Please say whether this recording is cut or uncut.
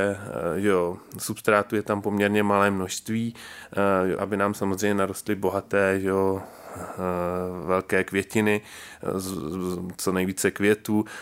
cut